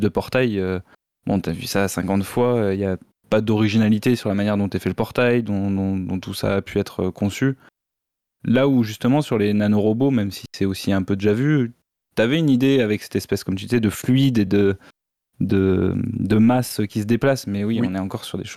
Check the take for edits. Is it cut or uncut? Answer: uncut